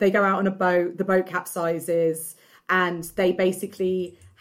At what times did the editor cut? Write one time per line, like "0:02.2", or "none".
none